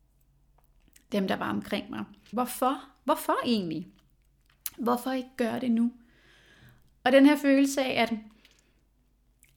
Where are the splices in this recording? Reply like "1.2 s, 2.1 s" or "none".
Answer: 2.3 s